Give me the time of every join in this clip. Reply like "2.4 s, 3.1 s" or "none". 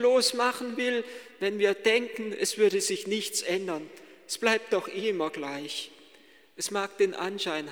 none